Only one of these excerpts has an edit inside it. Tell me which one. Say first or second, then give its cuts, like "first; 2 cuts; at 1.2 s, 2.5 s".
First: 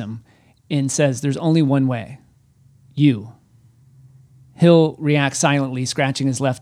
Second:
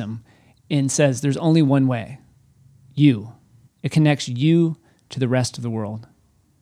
second; 1 cut; at 3.7 s